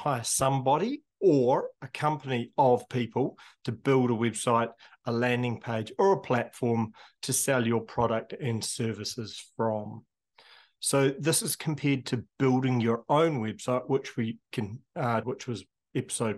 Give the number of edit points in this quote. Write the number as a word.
one